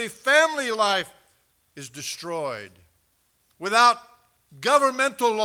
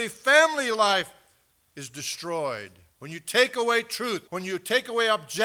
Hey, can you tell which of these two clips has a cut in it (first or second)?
second